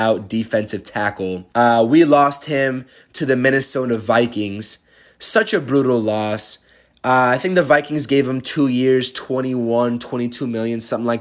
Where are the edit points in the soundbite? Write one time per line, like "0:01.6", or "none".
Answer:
0:01.5